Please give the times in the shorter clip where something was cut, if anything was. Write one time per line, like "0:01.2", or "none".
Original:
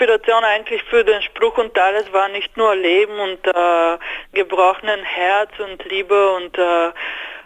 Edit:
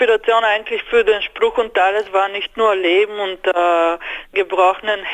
none

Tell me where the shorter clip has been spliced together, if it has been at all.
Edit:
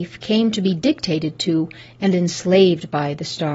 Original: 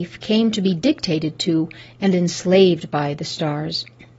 none

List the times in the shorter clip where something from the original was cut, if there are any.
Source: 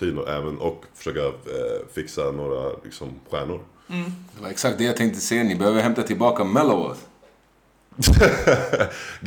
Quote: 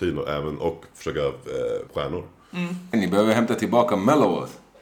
0:01.9
0:02.9

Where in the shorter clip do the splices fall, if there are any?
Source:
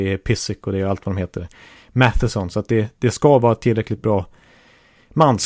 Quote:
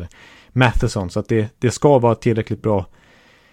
none

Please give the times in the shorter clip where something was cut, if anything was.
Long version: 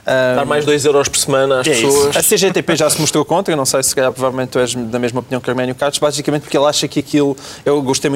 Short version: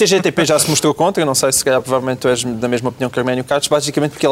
none

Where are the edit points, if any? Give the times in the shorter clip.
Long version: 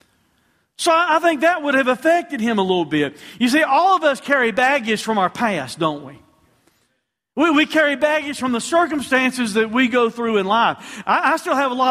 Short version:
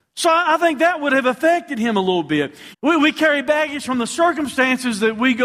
0:02.7

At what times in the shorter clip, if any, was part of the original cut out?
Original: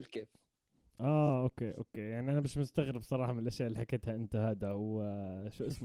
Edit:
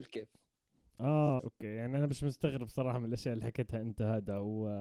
0:01.4

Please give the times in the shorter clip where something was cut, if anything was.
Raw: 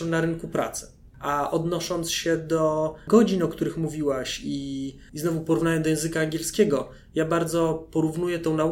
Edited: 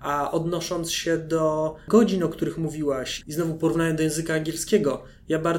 0:03.2

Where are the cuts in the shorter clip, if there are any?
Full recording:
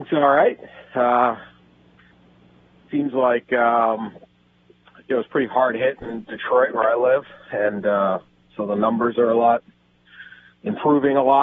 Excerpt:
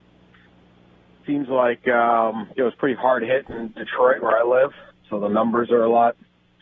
0:02.5
0:04.9

